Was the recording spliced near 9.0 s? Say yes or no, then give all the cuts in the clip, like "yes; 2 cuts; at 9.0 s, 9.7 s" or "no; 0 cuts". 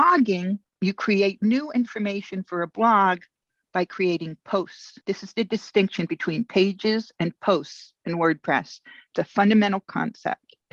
no; 1 cut; at 5.0 s